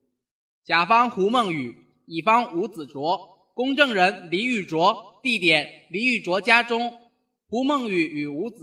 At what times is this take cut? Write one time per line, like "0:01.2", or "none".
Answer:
none